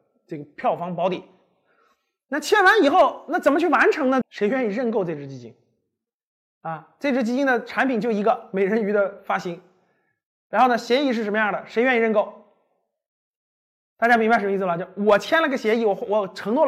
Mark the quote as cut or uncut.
cut